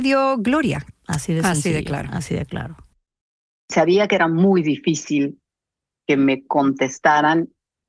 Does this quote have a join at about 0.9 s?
yes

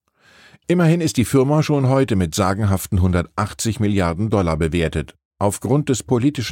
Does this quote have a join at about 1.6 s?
no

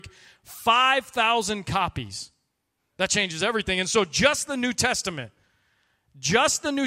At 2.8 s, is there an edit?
yes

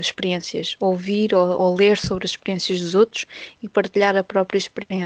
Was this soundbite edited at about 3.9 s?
no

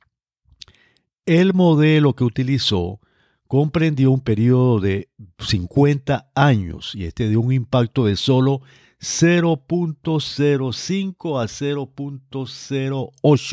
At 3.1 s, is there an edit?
no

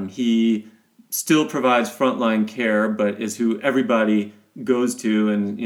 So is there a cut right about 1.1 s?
no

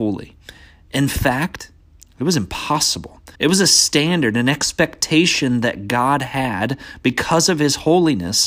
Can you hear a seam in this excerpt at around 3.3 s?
yes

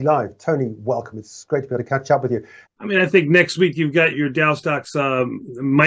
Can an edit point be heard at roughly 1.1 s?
no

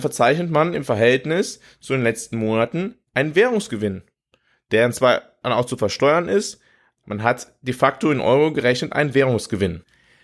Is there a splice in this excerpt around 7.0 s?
yes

